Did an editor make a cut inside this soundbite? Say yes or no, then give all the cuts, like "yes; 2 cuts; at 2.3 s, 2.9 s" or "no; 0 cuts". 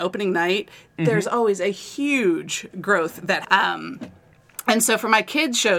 yes; 1 cut; at 3.4 s